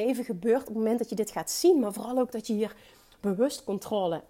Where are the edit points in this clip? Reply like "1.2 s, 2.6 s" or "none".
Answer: none

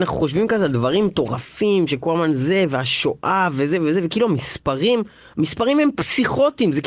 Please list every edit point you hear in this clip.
none

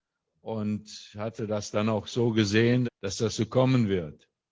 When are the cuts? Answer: 2.8 s

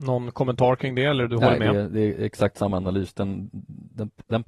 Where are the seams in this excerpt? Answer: none

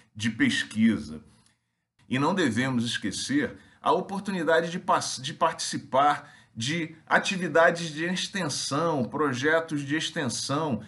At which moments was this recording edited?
2.0 s

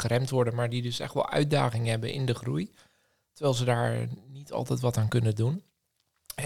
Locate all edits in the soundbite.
none

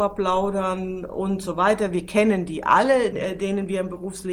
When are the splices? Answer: 3.1 s

